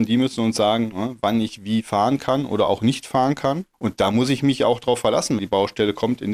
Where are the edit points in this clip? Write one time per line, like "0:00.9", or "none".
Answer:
0:03.7
0:05.4